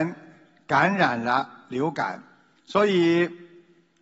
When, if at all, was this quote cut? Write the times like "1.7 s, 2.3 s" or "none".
2.6 s

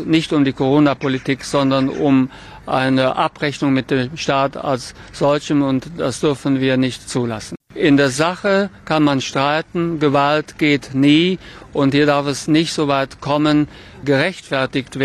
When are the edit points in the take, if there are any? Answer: 7.6 s, 14.0 s

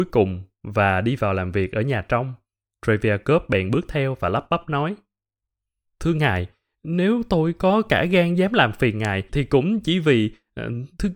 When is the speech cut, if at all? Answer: 9.3 s

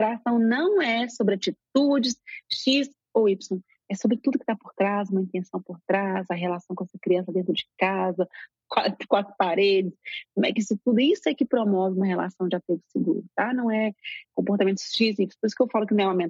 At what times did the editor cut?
none

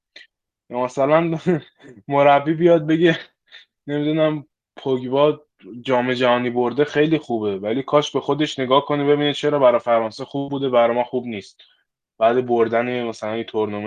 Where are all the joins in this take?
none

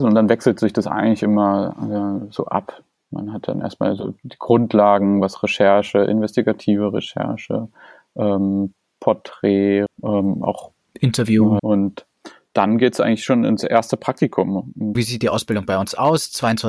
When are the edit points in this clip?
9.9 s, 11.6 s, 15.0 s

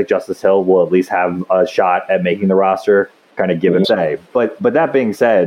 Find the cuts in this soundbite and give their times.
3.8 s

